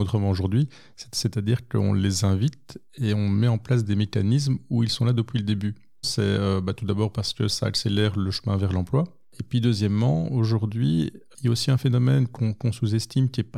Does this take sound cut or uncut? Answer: cut